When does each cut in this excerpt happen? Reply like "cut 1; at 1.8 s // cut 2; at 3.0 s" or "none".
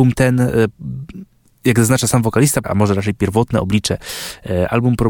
cut 1; at 2.6 s